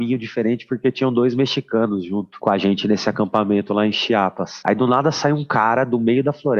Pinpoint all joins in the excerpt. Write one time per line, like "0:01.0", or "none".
none